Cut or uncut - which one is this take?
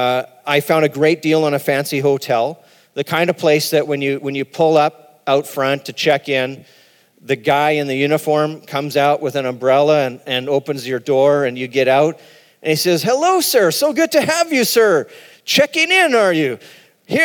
uncut